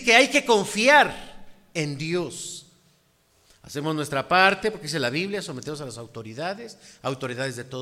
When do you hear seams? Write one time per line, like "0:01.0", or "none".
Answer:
none